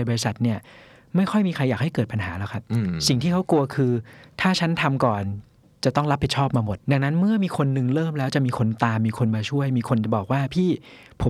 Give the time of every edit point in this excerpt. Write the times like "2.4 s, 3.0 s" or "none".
6.8 s